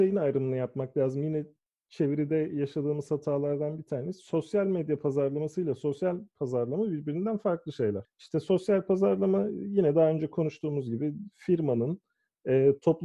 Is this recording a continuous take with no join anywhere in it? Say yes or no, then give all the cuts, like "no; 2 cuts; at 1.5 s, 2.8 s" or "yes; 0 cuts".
yes; 0 cuts